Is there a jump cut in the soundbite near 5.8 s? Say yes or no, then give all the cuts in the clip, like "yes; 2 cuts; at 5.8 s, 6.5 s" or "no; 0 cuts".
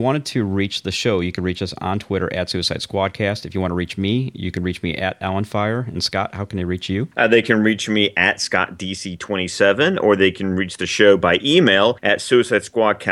no; 0 cuts